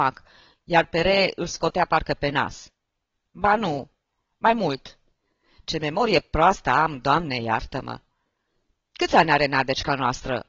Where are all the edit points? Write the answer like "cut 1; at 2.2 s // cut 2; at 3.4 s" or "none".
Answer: cut 1; at 3.2 s